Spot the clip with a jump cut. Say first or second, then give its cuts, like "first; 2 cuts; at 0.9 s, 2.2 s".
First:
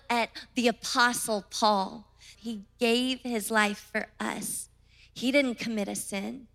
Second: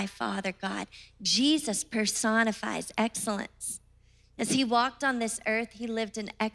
first; 1 cut; at 2.3 s